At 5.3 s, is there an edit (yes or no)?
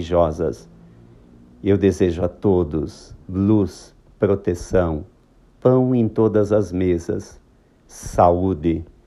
no